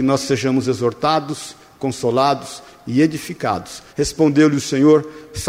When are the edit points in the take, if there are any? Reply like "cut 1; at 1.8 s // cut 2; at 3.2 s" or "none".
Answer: cut 1; at 3.9 s